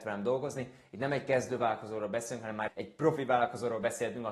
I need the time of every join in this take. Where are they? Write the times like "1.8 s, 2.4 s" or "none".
2.7 s